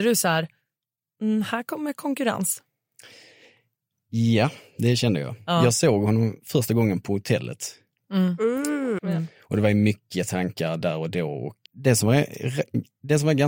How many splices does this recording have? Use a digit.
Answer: 3